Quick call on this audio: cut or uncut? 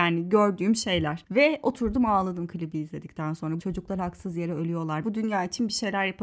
cut